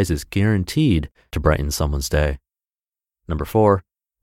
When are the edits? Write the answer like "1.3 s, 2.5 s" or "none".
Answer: none